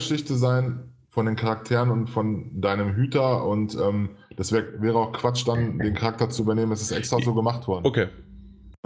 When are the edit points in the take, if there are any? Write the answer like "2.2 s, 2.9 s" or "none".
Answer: none